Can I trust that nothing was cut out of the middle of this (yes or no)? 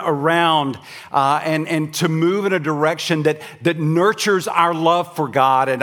yes